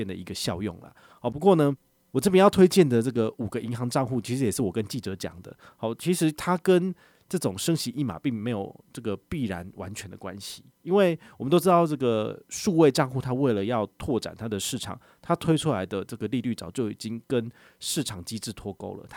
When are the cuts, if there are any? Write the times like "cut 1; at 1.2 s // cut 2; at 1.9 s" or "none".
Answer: cut 1; at 10.7 s